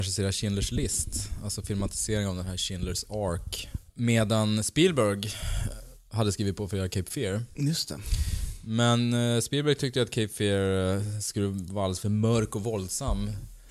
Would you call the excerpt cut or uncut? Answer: uncut